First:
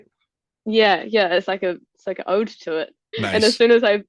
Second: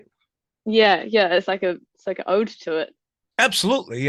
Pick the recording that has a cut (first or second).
first